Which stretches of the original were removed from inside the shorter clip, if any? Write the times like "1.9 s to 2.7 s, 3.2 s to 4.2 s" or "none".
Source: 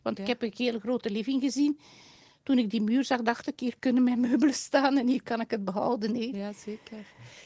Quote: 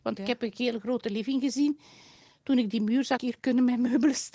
3.2 s to 3.6 s